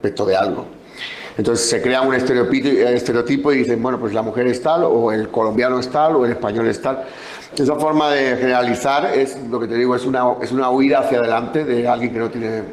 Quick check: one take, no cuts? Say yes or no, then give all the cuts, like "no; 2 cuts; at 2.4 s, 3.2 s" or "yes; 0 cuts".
yes; 0 cuts